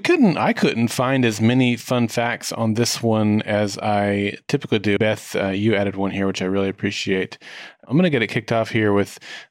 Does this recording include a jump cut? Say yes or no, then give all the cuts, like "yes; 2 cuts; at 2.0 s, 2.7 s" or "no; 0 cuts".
yes; 1 cut; at 5.0 s